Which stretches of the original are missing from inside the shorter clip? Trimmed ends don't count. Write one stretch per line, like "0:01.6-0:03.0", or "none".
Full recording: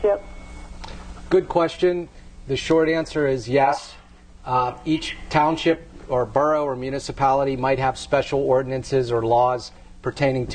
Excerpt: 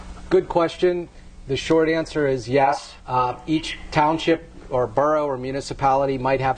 0:04.0-0:04.4